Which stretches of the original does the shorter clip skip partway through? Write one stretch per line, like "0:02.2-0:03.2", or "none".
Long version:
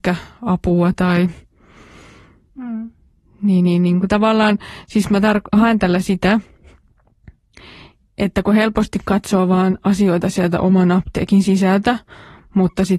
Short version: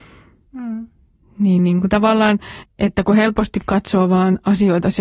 0:03.6-0:03.8
0:04.8-0:08.0

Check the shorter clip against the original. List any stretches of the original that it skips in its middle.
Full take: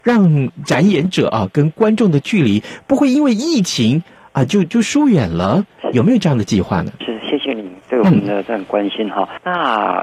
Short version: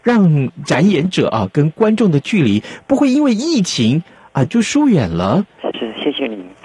0:04.5-0:04.7
0:05.9-0:07.0

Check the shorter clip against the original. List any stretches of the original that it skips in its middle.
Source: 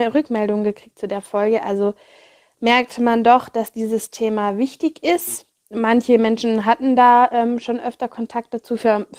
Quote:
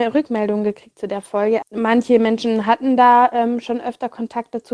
0:01.6-0:05.6

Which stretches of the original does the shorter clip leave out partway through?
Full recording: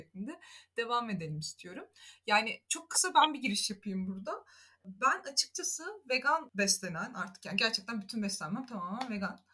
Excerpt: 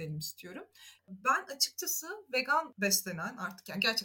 0:02.2-0:04.8

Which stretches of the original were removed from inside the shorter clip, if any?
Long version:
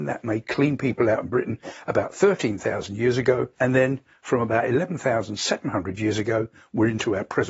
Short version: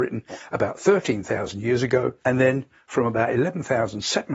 none

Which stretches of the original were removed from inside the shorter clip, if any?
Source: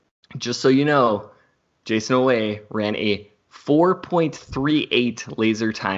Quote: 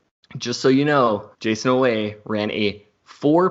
0:01.3-0:01.8

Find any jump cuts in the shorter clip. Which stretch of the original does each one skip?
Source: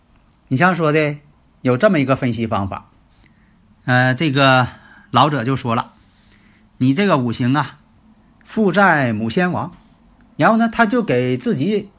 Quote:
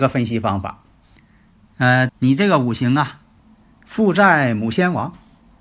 0:04.2-0:06.7

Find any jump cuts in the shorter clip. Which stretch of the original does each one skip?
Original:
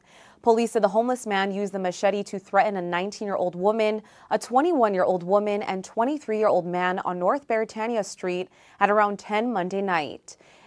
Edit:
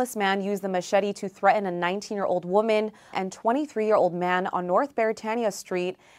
0:04.2-0:05.6

